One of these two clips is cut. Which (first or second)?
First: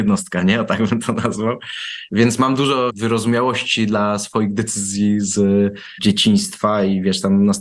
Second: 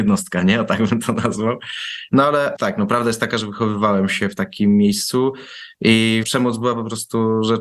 second